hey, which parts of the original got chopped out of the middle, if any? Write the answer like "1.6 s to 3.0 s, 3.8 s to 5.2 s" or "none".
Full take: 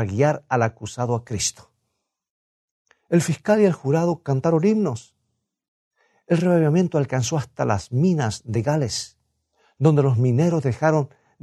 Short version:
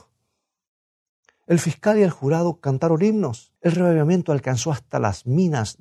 5.2 s to 6.2 s